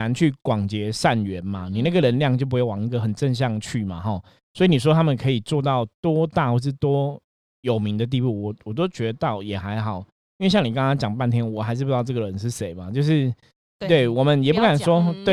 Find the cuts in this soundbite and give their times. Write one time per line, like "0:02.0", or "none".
none